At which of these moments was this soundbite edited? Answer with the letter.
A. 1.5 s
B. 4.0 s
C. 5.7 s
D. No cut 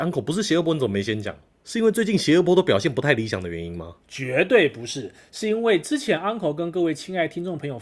D